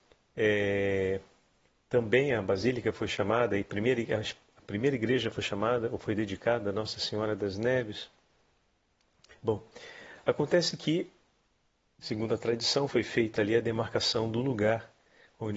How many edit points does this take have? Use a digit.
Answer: 0